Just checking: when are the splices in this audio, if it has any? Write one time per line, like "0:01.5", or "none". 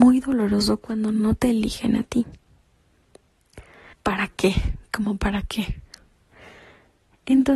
0:03.9

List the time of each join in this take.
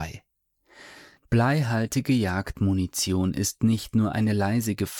0:01.2

